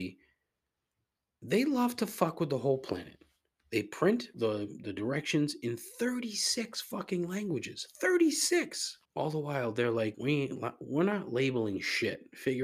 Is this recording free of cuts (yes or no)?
no